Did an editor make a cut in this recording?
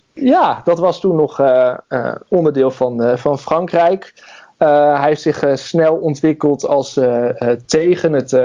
no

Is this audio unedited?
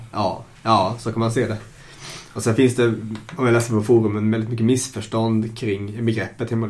yes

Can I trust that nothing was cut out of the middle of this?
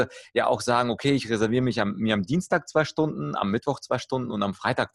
yes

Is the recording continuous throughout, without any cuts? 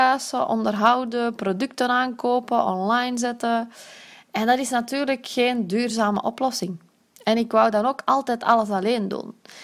yes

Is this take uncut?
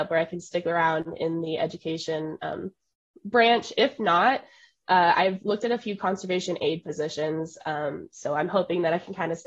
yes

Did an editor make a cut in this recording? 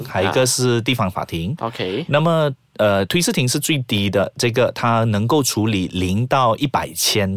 no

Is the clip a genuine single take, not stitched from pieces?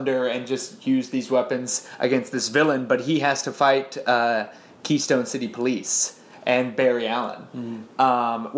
yes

